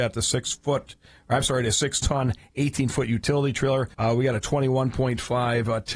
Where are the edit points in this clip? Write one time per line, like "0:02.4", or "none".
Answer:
0:03.9

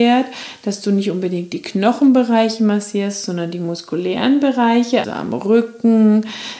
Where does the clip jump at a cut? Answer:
0:05.0

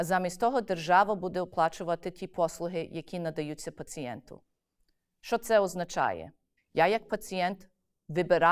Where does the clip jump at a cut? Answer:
0:06.6

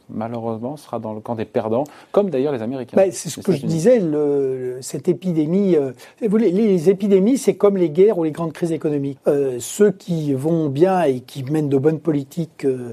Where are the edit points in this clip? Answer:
0:09.2

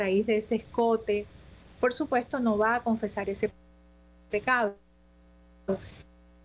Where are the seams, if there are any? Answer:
0:01.8

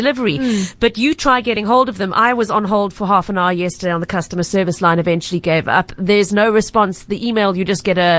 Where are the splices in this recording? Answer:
none

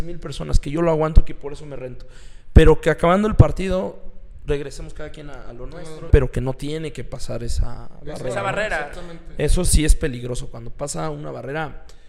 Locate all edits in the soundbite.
0:06.1

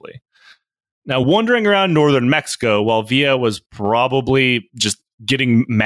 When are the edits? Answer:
none

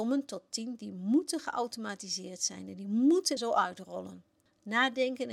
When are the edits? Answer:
0:03.4

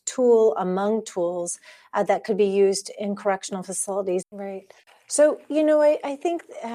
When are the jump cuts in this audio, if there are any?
0:04.2

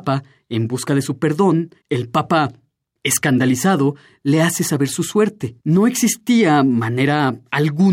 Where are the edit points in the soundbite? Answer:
0:01.8
0:05.6

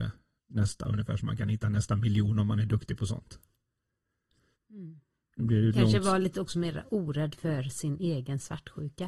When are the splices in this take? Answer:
0:04.5

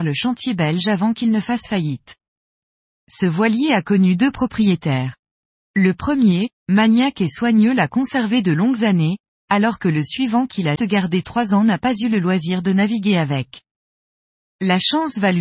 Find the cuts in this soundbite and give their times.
0:10.8
0:14.4

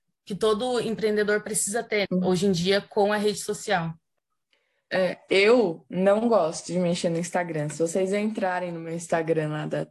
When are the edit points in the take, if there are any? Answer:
0:02.1

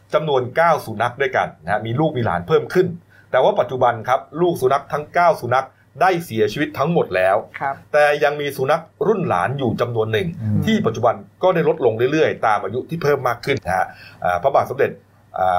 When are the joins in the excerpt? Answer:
0:13.6

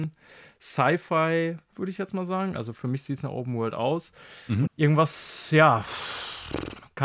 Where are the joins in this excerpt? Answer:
0:01.7
0:04.7

